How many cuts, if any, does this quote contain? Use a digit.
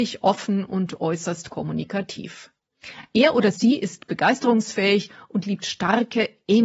0